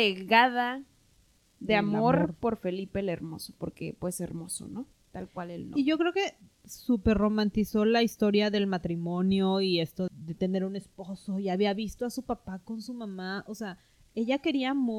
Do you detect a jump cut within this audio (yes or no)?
yes